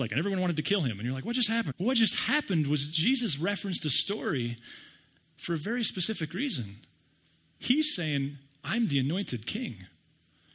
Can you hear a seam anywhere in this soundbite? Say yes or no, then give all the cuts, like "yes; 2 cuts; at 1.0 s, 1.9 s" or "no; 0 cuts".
yes; 1 cut; at 1.7 s